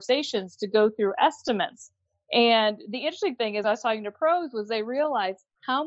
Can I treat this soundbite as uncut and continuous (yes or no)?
yes